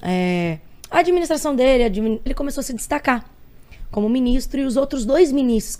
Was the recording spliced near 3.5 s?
no; 1 cut; at 2.3 s

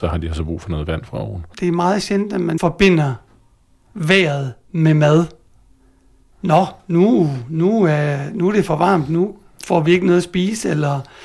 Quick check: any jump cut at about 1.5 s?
yes; 1 cut; at 1.5 s

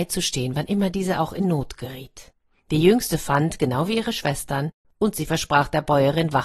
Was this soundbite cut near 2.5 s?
no; 1 cut; at 4.8 s

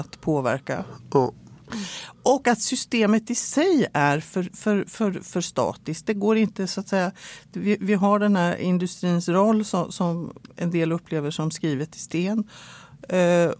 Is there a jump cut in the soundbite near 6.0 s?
no; 0 cuts

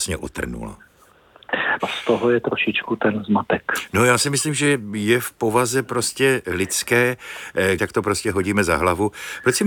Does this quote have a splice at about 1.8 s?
yes; 2 cuts; at 1.8 s, 7.8 s

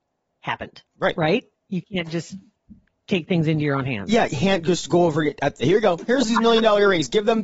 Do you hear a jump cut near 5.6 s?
yes; 1 cut; at 5.6 s

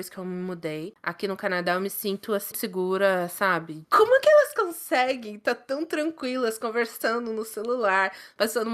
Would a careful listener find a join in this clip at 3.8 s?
yes; 2 cuts; at 2.5 s, 3.8 s

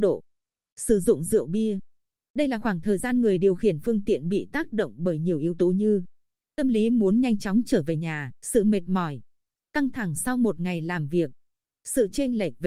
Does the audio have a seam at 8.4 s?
yes; 1 cut; at 8.4 s

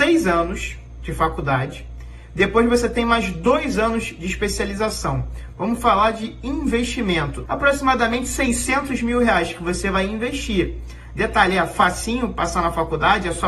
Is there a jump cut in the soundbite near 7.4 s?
yes; 1 cut; at 7.4 s

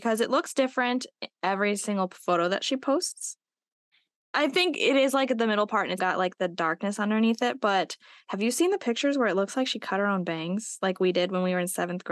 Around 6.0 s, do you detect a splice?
yes; 1 cut; at 6.0 s

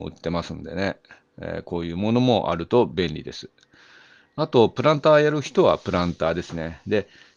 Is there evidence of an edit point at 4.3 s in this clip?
no; 0 cuts

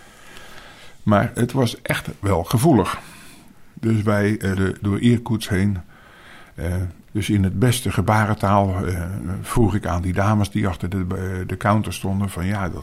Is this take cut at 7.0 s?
yes; 2 cuts; at 4.6 s, 7.0 s

